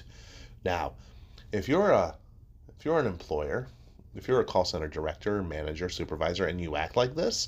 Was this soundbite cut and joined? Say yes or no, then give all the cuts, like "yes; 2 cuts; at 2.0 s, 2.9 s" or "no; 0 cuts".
no; 0 cuts